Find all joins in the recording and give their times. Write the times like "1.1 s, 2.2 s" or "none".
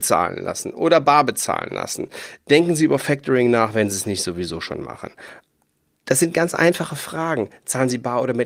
none